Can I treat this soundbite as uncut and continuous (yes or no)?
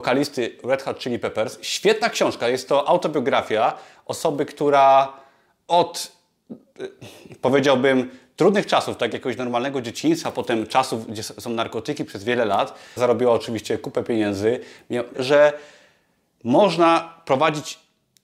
no